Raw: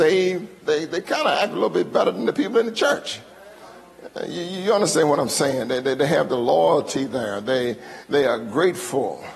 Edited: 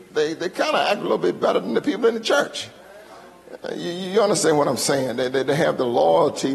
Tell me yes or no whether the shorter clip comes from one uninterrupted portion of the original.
yes